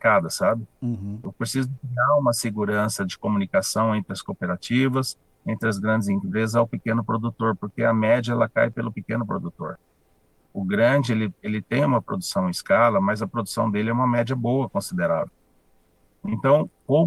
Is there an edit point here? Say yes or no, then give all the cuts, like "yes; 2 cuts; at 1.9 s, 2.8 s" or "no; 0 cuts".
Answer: no; 0 cuts